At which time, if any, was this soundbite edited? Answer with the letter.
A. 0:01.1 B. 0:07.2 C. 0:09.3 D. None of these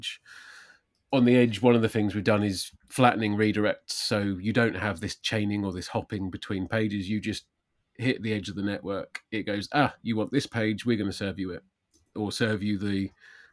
D